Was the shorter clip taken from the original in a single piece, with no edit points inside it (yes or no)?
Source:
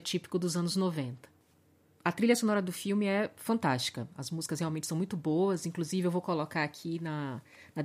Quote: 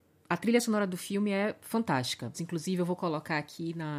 no